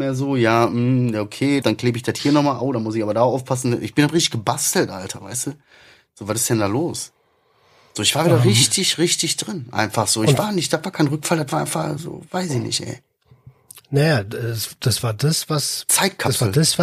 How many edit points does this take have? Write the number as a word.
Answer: one